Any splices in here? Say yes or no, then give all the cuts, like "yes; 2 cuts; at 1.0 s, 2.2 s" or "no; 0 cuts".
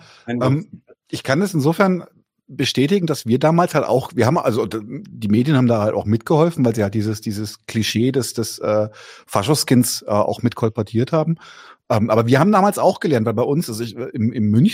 no; 0 cuts